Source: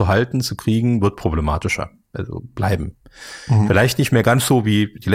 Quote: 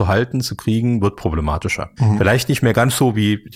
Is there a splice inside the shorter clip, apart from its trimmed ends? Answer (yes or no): yes